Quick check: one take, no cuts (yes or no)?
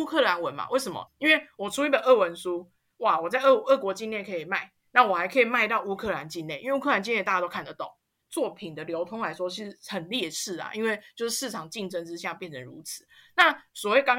no